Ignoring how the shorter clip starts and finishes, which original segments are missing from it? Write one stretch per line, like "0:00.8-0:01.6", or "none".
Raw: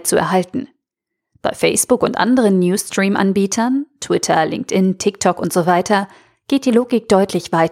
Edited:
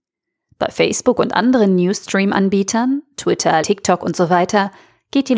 0:04.5-0:05.0

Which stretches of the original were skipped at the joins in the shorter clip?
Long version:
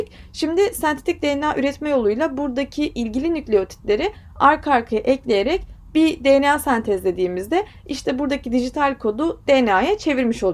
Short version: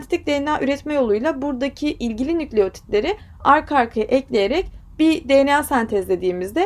none

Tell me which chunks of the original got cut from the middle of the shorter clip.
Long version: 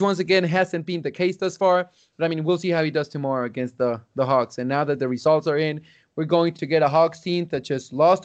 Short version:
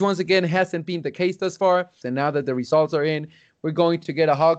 0:02.0-0:04.6

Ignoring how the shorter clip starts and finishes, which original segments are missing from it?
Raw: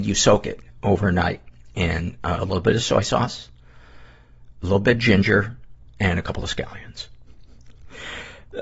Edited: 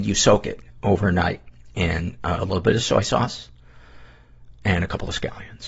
0:04.5-0:05.9

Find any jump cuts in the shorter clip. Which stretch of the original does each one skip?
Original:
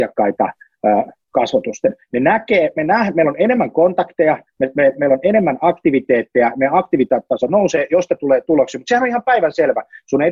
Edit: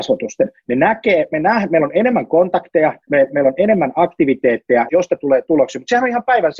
0:04.5-0:04.7
0:06.5-0:07.9

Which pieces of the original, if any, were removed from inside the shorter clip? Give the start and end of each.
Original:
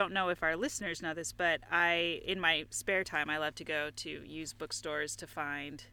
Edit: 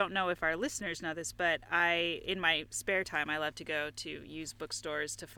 none

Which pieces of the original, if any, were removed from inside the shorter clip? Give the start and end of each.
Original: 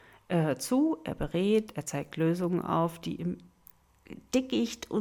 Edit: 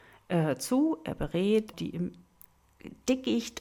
0:01.7-0:03.0

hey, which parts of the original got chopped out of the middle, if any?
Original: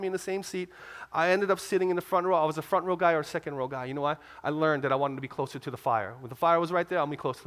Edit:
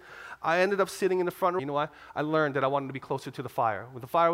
0:02.3-0:03.9

